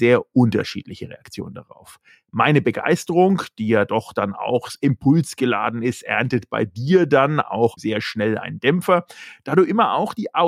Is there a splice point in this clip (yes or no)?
no